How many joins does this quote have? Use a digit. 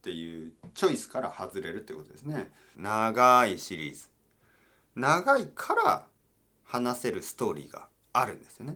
1